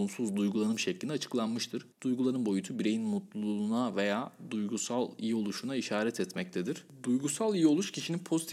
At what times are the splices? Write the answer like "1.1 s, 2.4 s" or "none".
1.9 s